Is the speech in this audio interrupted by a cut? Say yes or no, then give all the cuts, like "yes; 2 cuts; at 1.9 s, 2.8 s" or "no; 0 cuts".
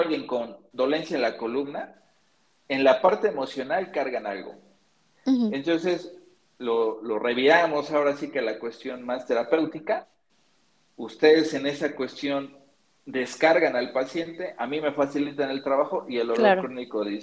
no; 0 cuts